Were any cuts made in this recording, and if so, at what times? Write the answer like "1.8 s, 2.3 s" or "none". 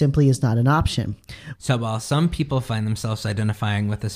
1.6 s